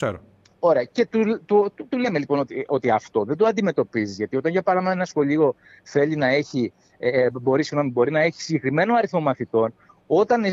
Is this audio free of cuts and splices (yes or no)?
yes